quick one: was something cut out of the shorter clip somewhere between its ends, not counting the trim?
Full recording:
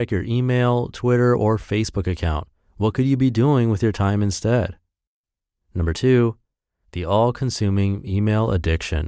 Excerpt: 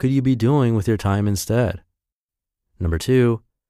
no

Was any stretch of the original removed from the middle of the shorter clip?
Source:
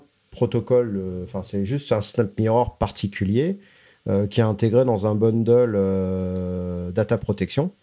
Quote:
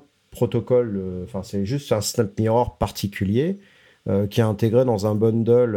no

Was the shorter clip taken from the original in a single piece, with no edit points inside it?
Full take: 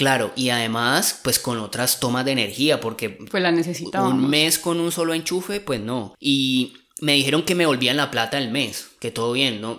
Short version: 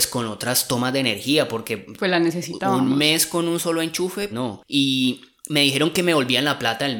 no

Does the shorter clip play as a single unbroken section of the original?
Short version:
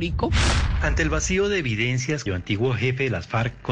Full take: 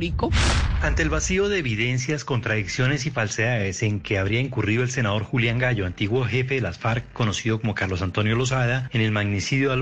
no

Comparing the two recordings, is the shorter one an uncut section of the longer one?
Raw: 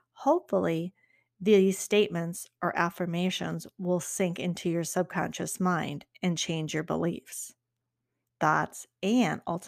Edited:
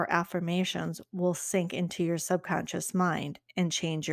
yes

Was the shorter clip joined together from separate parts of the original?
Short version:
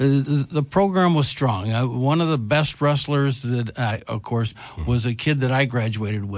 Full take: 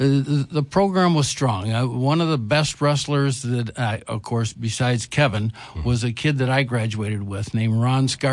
yes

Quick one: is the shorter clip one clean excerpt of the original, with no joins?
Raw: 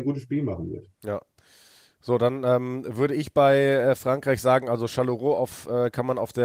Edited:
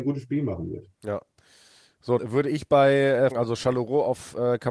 no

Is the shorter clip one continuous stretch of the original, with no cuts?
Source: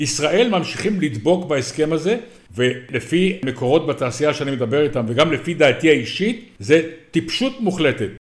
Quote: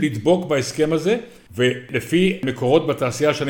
yes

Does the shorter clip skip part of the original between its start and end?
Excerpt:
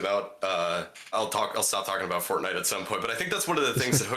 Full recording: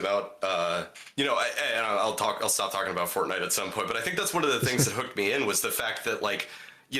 yes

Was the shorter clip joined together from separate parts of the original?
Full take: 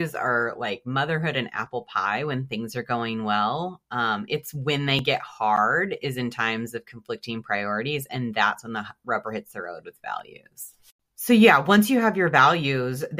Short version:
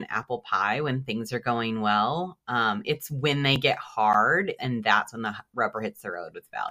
yes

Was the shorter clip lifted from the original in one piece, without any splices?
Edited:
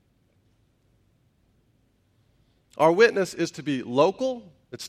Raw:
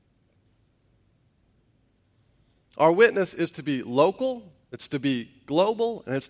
yes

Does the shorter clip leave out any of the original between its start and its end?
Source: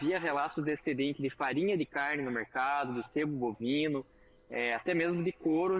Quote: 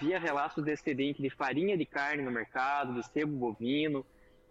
no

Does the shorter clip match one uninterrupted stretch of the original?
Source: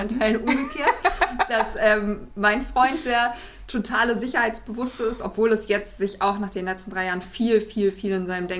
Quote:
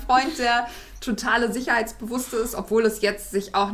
yes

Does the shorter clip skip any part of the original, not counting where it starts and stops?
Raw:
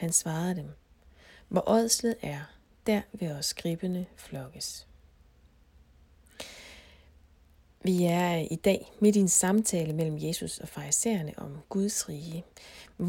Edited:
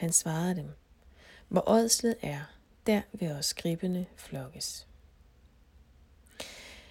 no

